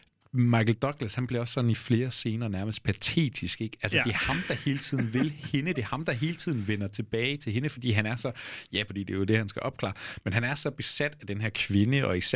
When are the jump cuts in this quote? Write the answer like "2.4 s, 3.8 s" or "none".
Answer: 8.9 s